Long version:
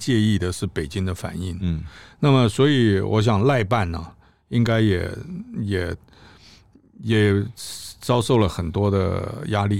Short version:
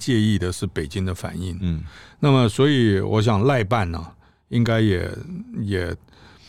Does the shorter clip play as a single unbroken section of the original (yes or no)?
yes